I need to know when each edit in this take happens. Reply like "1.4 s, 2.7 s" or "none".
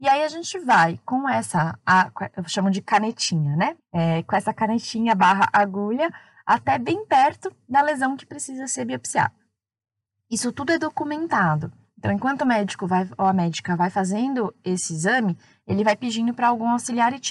3.8 s